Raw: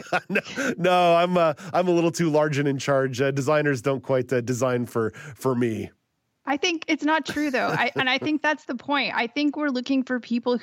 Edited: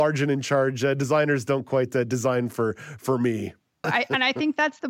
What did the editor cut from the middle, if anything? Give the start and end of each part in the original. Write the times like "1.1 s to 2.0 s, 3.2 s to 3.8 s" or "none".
6.2 s to 7.7 s